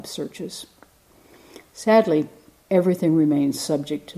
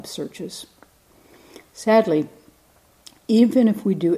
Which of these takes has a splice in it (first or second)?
first